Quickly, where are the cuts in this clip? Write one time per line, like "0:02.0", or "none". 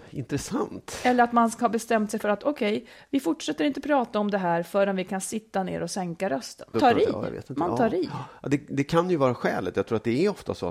0:06.7